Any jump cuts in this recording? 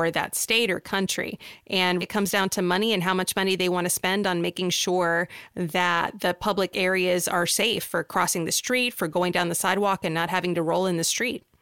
yes; 1 cut; at 2.0 s

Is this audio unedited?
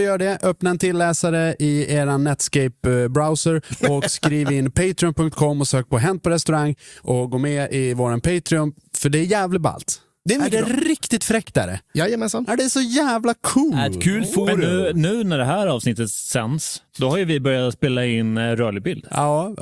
yes; 0 cuts

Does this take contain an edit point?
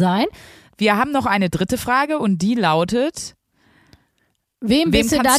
no; 0 cuts

